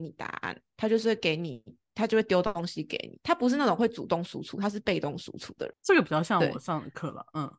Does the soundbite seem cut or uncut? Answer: cut